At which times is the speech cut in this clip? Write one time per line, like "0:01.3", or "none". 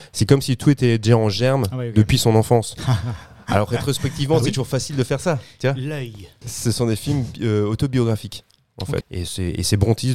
0:06.4
0:09.0